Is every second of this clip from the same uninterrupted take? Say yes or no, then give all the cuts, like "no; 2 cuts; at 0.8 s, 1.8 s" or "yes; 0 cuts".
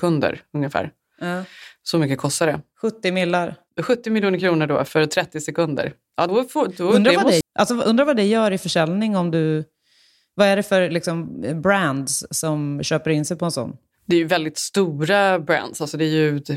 no; 2 cuts; at 6.3 s, 7.4 s